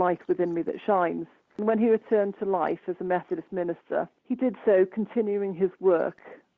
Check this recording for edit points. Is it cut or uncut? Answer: cut